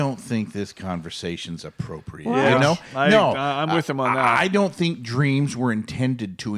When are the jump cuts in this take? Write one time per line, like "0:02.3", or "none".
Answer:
none